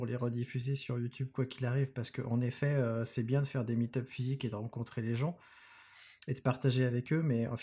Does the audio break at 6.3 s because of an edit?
no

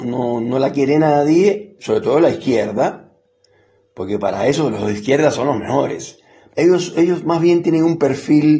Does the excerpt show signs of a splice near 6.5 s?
yes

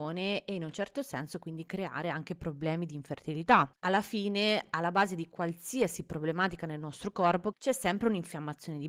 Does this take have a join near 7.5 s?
yes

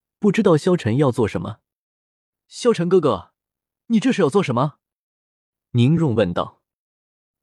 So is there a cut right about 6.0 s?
yes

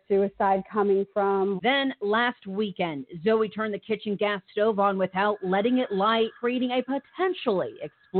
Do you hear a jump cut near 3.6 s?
no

